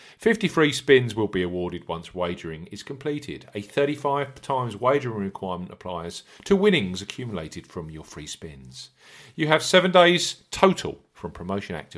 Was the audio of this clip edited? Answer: no; 0 cuts

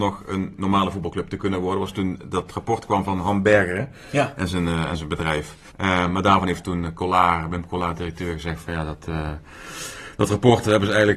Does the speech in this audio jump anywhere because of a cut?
yes; 1 cut; at 5.7 s

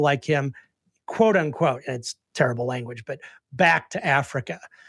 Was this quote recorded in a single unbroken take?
yes; 0 cuts

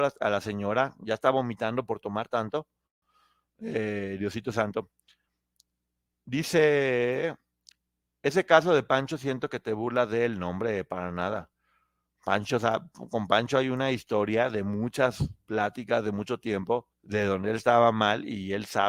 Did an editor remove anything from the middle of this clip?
yes; 1 cut; at 16.9 s

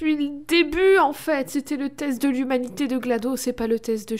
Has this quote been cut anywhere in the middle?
no; 0 cuts

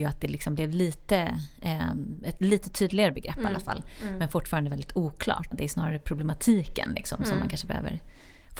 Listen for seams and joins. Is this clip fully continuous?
no; 1 cut; at 5.5 s

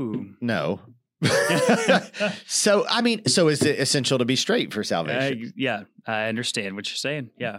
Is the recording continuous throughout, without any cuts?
yes; 0 cuts

